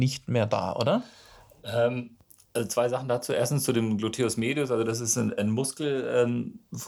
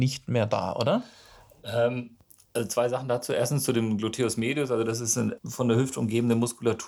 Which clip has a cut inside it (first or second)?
second